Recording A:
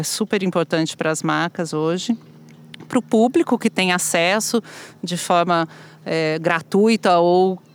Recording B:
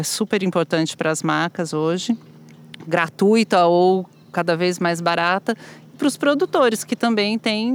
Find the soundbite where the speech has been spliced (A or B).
B